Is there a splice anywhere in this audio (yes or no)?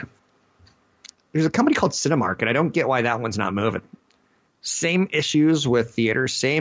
yes